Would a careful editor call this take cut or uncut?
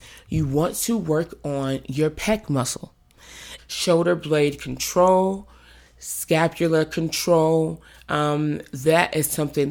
cut